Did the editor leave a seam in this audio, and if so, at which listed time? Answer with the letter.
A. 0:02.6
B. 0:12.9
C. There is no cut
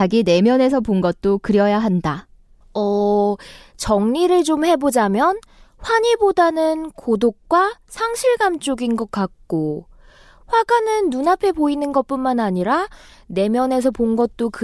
A